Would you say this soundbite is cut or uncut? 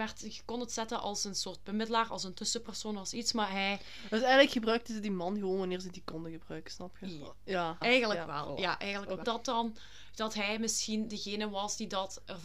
cut